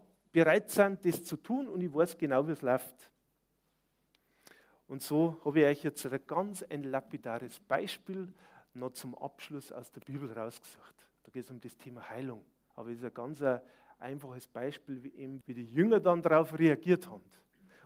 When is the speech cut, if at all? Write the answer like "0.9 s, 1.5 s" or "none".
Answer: 12.7 s, 15.4 s